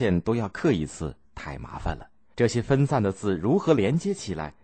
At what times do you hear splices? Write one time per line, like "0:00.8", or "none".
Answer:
0:02.3